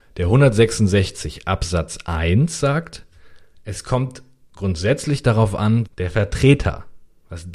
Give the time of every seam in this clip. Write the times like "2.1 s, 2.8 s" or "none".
5.9 s